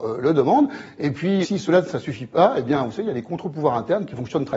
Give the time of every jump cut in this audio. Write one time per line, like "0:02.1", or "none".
0:01.4